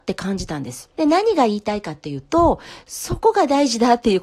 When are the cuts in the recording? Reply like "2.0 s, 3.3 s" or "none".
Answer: 0.9 s